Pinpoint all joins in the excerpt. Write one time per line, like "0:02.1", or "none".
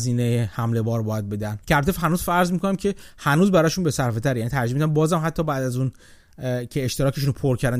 0:01.6